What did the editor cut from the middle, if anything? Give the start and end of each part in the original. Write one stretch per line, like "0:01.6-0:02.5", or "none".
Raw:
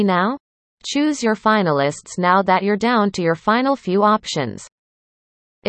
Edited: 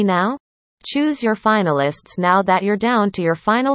none